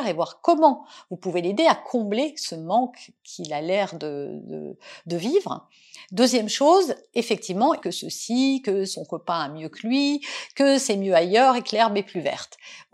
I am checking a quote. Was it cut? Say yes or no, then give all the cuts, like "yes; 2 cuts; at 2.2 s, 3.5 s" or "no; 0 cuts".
yes; 1 cut; at 7.8 s